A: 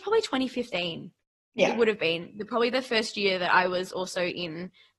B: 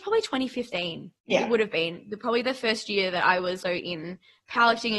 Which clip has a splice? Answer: B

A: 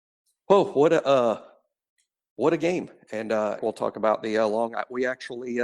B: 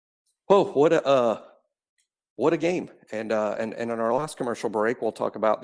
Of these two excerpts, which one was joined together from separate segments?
A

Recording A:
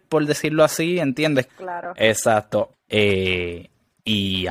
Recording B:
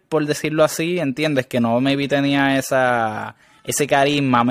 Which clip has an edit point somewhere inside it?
A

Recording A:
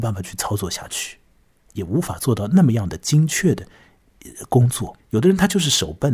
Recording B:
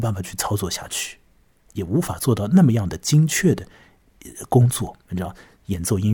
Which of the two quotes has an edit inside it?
A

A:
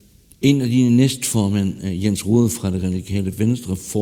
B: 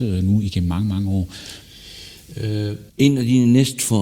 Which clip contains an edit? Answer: B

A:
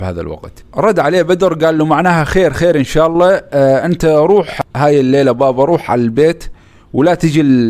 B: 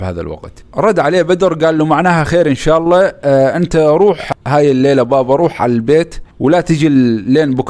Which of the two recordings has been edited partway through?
B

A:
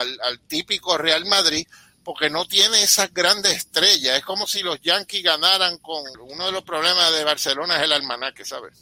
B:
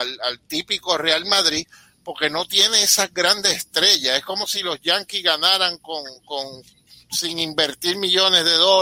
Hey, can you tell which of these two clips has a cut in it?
A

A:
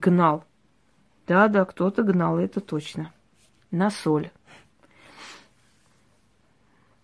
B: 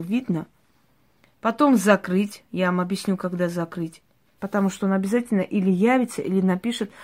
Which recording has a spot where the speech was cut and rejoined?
B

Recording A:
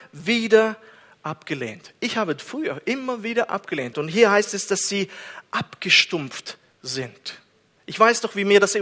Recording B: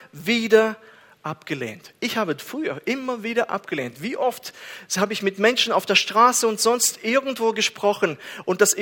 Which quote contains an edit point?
A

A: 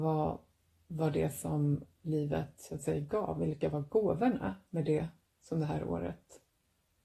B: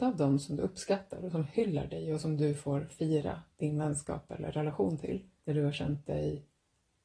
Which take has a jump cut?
B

